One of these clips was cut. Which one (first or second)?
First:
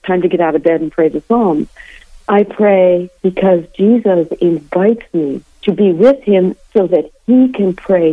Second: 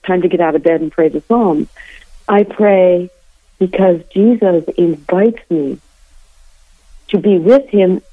first